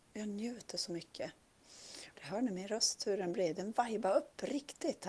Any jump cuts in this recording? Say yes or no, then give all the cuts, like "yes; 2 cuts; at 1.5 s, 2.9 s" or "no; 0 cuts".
yes; 1 cut; at 2.2 s